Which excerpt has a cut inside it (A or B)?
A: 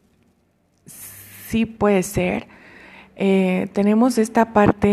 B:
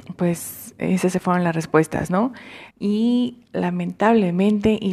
B